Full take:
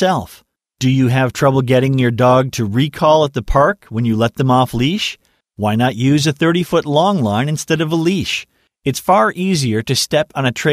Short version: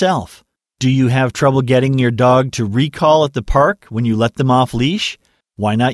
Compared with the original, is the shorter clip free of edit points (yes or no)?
yes